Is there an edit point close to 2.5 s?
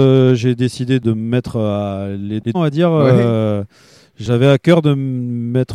yes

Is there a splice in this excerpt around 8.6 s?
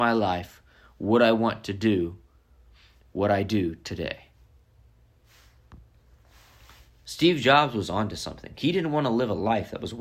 no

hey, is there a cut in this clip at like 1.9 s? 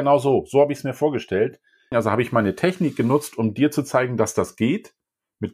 yes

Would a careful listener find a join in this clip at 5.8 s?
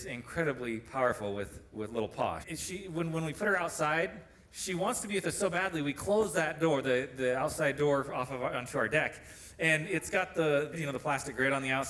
no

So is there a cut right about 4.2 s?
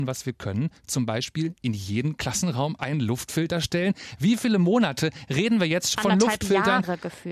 no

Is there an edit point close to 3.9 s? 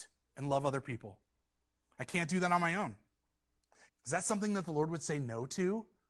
yes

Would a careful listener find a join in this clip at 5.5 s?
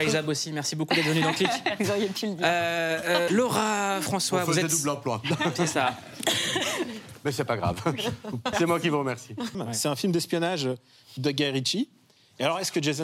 no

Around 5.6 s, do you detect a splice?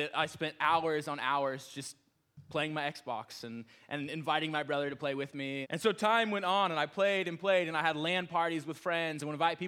yes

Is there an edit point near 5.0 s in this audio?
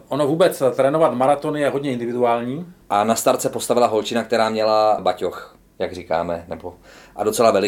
yes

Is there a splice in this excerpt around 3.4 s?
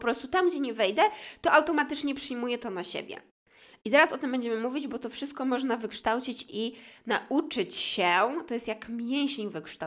no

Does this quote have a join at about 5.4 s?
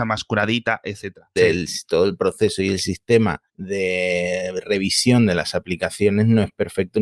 no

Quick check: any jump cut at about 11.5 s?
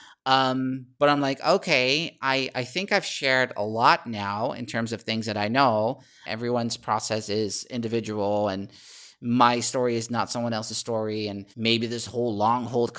yes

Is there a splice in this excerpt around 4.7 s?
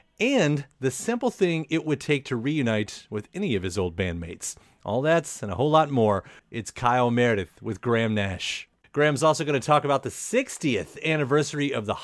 no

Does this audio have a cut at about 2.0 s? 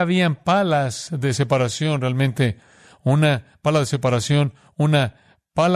no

